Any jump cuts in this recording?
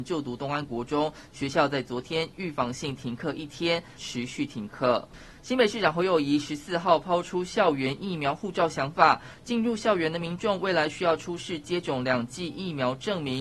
yes; 1 cut; at 4.0 s

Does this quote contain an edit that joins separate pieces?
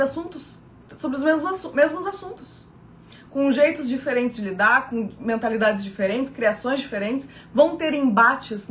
no; 0 cuts

